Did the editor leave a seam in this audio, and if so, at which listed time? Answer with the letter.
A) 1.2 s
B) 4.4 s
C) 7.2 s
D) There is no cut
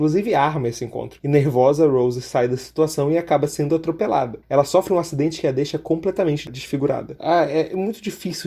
C